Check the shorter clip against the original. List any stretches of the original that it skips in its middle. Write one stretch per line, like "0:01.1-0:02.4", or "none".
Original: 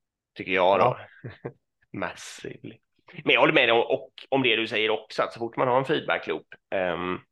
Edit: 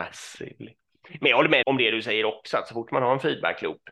0:03.7-0:04.3